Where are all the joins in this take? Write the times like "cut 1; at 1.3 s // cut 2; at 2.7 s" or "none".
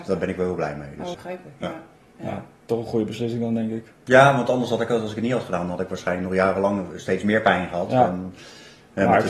cut 1; at 1.1 s